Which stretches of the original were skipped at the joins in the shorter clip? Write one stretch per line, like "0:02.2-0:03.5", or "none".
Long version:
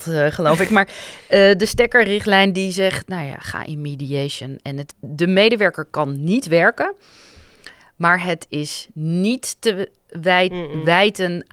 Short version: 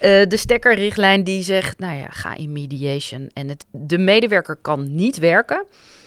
none